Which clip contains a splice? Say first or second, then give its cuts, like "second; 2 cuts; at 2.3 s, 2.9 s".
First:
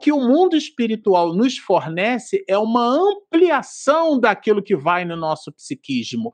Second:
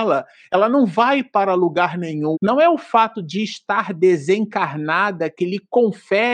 second; 1 cut; at 2.3 s